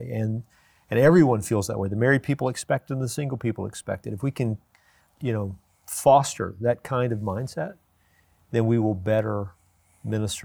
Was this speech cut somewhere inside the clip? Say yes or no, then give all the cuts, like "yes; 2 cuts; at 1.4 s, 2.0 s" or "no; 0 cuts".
no; 0 cuts